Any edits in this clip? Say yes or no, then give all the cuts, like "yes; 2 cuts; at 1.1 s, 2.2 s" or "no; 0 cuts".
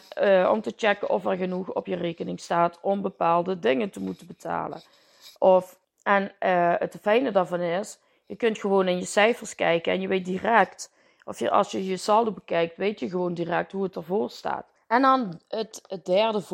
no; 0 cuts